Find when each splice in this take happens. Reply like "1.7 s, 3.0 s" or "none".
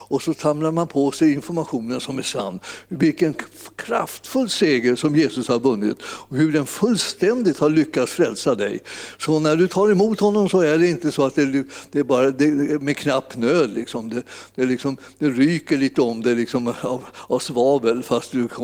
none